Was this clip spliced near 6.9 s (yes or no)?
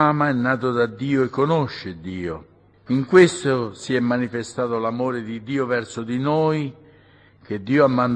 no